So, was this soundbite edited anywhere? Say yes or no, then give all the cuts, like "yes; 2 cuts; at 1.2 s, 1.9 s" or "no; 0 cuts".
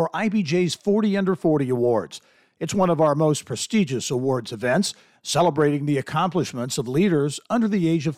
no; 0 cuts